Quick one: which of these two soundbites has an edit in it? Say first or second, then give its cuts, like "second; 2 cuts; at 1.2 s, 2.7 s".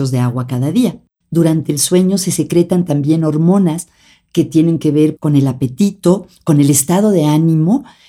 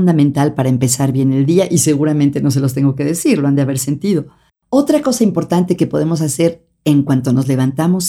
first; 2 cuts; at 1.2 s, 5.2 s